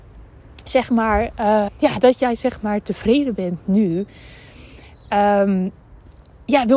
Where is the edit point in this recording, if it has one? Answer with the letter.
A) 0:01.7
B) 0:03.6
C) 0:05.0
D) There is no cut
A